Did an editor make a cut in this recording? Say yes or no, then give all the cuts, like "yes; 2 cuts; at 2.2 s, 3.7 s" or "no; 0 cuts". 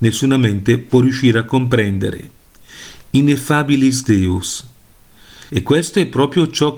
yes; 1 cut; at 5.5 s